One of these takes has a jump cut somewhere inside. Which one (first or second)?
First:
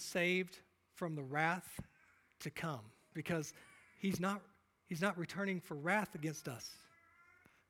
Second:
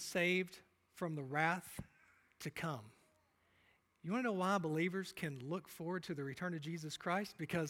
first